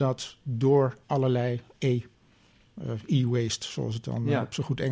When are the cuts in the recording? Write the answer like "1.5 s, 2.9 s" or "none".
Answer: 1.0 s